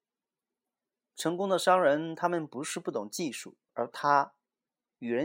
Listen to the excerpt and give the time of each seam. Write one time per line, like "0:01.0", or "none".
0:03.7